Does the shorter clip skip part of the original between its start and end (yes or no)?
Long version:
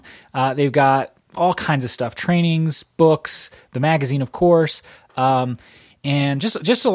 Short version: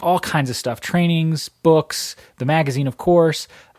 no